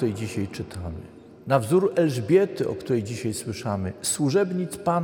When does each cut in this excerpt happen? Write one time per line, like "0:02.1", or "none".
none